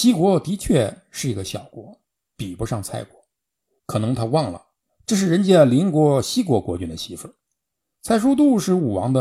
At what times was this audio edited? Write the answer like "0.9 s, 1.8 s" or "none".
3.8 s, 7.9 s